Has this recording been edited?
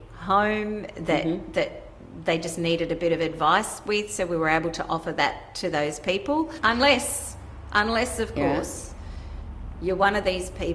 yes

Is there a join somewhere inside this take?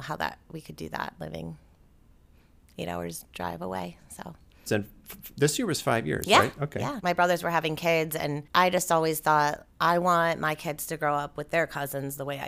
yes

